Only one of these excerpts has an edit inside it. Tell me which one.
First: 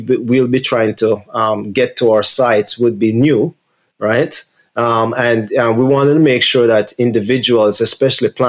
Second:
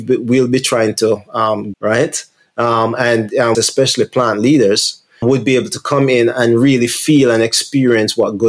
second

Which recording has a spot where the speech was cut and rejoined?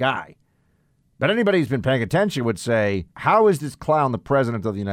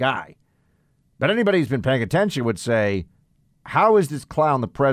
first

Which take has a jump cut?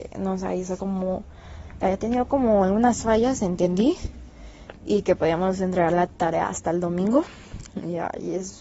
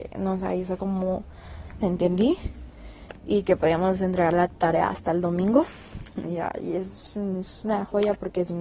second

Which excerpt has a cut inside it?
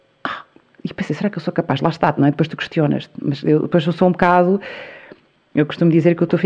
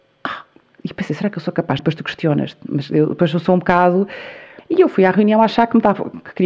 second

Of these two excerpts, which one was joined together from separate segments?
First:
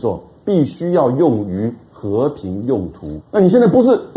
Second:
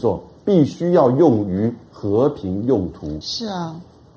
first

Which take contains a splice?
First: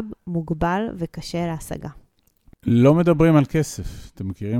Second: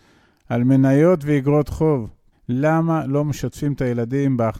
second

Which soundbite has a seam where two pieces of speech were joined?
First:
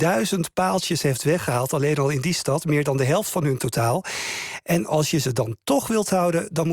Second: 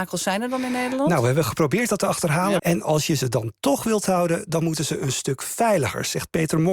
second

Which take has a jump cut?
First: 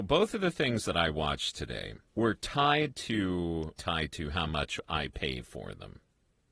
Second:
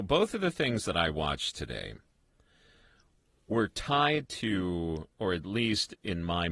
first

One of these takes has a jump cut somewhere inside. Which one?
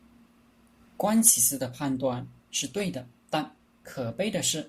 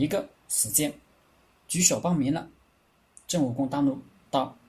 second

